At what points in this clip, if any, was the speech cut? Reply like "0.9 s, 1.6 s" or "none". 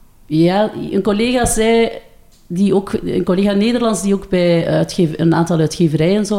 none